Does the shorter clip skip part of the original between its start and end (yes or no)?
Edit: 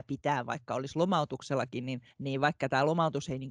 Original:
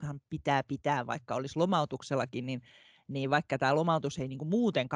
yes